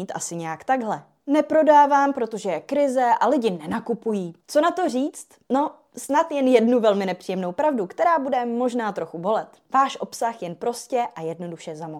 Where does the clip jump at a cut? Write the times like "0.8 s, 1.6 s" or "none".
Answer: 4.4 s, 9.7 s